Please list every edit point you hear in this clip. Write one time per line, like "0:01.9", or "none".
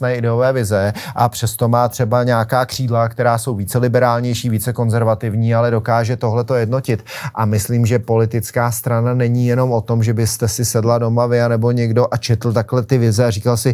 none